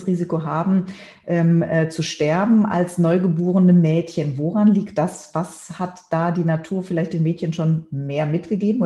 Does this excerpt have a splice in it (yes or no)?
no